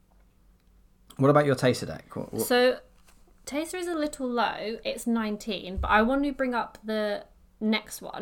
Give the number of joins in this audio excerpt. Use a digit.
1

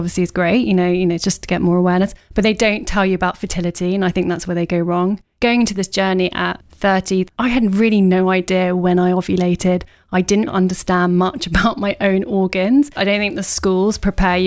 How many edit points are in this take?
3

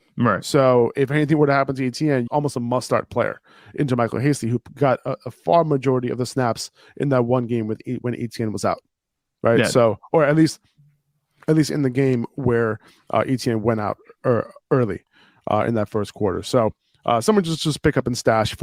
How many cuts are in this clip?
1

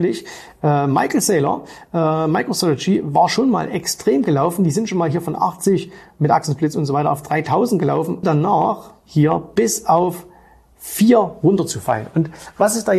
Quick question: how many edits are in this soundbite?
1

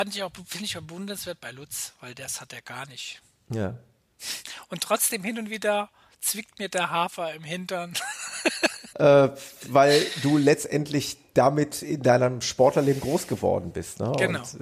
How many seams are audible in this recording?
1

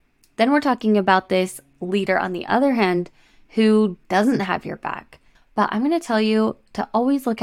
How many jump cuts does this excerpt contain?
1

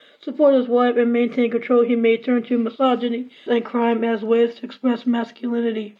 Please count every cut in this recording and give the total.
1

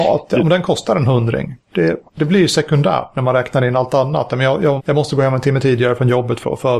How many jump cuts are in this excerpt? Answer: 2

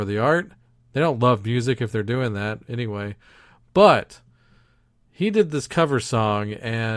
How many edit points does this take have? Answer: 0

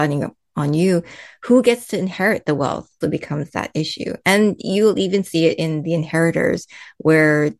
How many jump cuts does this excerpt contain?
1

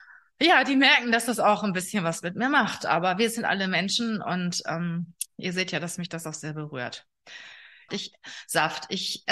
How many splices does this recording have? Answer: 1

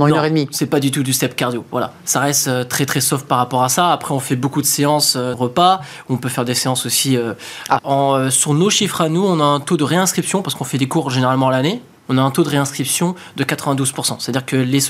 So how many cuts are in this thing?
3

